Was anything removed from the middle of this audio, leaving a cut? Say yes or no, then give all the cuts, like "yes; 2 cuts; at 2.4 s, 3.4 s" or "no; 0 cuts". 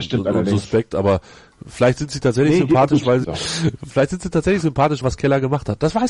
yes; 2 cuts; at 3.2 s, 5.0 s